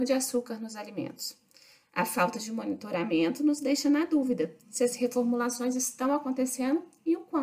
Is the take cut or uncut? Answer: uncut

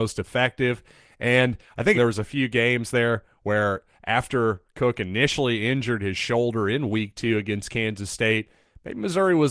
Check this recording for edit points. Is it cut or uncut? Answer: cut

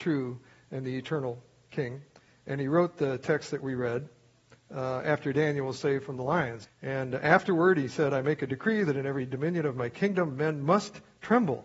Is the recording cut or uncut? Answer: cut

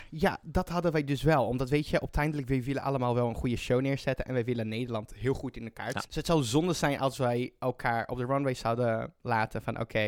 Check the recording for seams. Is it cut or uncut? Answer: cut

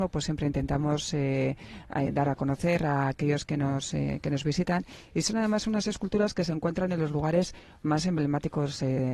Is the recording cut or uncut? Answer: uncut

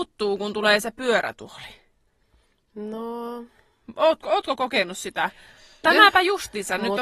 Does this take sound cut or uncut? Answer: cut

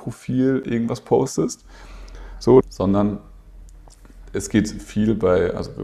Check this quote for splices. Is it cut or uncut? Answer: cut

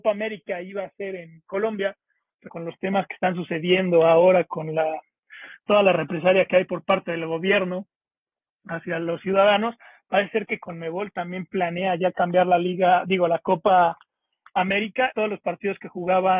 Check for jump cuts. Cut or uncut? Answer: cut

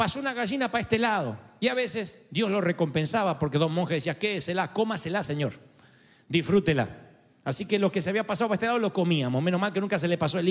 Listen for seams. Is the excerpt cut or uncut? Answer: uncut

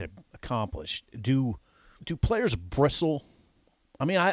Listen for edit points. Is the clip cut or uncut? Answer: cut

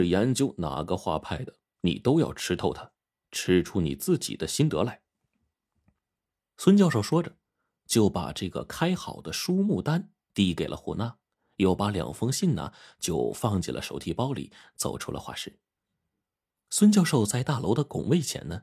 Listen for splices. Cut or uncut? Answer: uncut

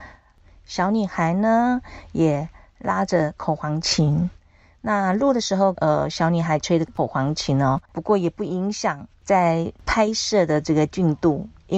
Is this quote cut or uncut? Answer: cut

